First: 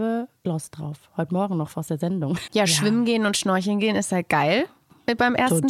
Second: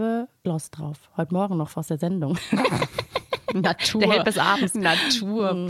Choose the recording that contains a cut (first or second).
first